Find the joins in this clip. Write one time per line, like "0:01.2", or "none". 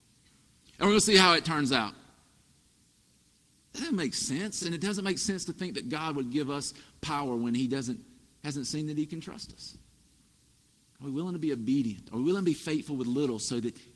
none